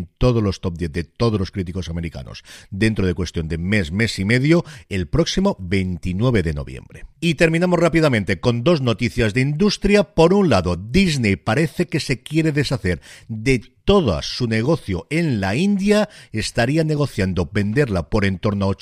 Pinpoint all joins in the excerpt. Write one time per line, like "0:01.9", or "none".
none